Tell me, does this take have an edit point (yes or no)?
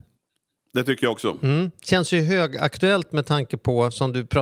no